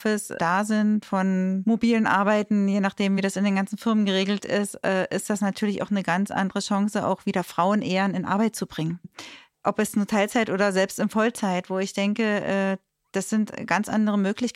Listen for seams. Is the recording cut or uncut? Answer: uncut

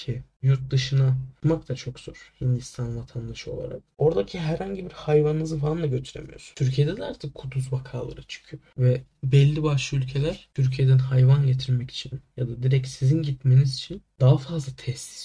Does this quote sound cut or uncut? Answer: uncut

